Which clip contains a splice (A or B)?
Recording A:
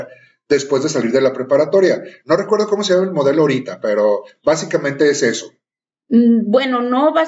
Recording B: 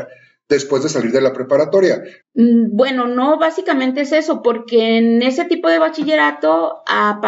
B